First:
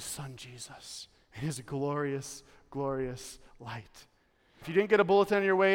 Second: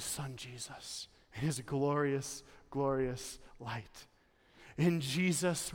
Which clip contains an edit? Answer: first; 1 cut; at 4.6 s

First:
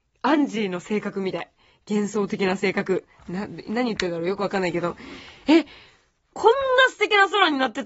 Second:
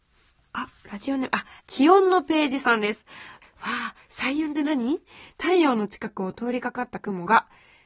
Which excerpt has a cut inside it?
second; 2 cuts; at 1.6 s, 3.4 s

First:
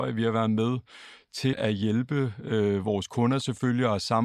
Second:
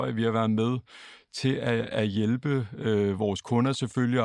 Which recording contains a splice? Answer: first; 1 cut; at 1.5 s

